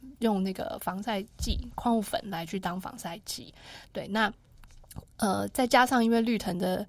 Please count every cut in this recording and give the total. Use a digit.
0